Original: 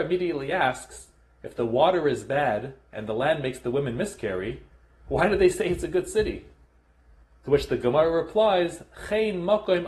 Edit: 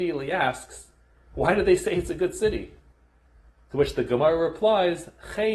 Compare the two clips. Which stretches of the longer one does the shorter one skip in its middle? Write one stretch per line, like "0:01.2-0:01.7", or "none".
0:01.3-0:04.9